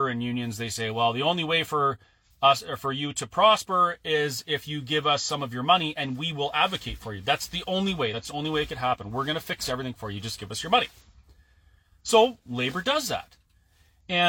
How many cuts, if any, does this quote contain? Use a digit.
0